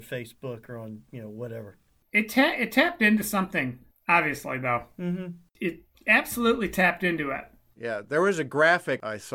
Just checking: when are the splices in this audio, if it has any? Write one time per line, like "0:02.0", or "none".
none